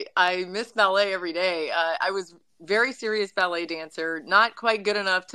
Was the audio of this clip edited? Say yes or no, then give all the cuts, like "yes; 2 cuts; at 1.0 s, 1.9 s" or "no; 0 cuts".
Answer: no; 0 cuts